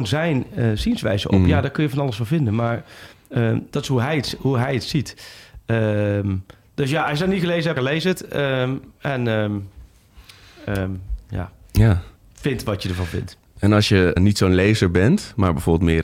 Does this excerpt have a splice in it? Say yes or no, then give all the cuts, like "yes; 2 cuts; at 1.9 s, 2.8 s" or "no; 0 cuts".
yes; 2 cuts; at 7.8 s, 14.2 s